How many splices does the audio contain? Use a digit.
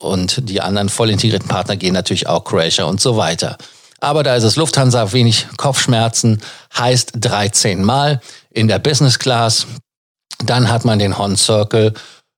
0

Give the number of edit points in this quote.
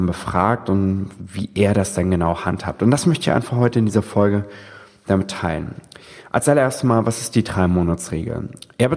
0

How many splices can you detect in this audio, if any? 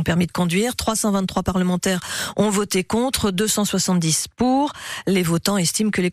0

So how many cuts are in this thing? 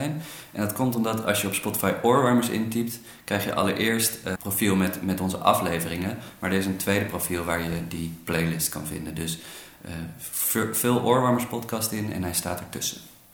1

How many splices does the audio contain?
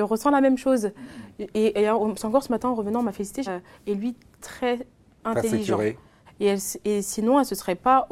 2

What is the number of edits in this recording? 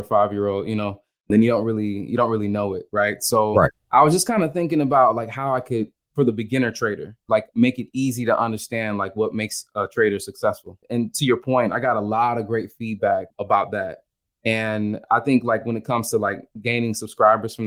0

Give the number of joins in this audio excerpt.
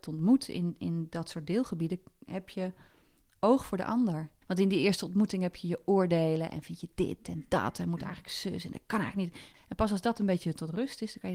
2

